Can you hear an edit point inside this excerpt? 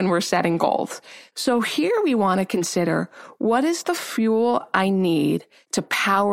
no; 0 cuts

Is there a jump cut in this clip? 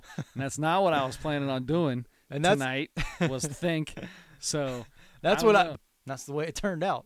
yes; 1 cut; at 5.7 s

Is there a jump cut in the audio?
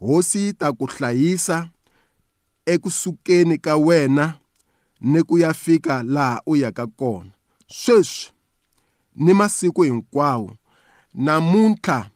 no; 0 cuts

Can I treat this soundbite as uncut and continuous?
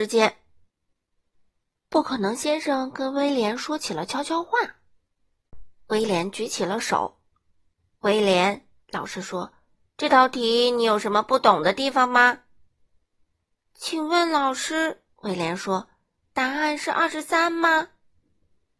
yes; 0 cuts

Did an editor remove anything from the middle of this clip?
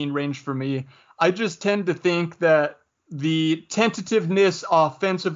yes; 1 cut; at 2.9 s

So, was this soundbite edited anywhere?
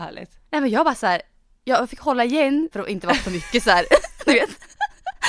yes; 1 cut; at 2.7 s

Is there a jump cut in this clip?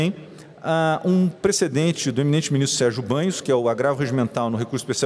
no; 0 cuts

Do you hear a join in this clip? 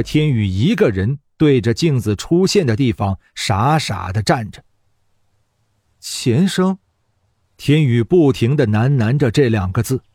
yes; 1 cut; at 7.4 s

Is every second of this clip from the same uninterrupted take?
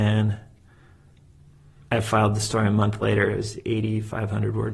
yes; 0 cuts

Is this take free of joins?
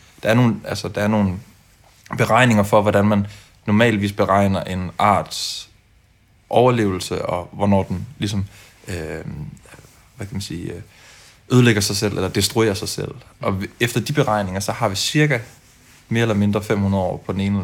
yes; 0 cuts

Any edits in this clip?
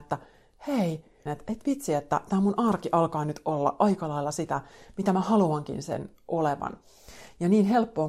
yes; 1 cut; at 1.3 s

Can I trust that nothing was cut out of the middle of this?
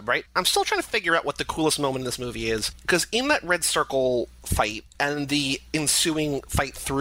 yes; 0 cuts

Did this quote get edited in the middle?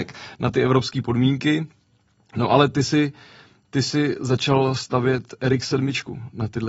no; 0 cuts

